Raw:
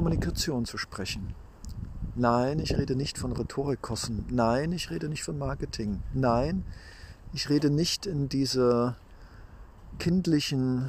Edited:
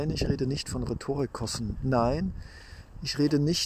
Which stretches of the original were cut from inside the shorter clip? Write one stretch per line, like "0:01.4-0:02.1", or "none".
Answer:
0:04.2-0:06.1